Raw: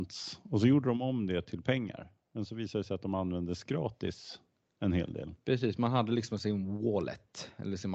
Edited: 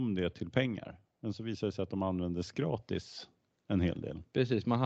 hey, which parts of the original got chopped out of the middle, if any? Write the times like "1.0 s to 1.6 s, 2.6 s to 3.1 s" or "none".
none